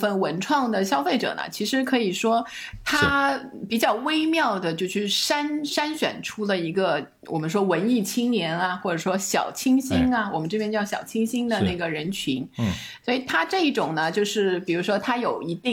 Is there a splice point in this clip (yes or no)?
yes